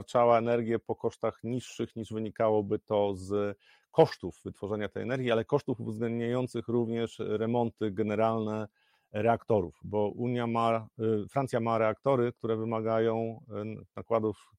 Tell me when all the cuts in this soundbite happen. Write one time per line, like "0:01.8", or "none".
none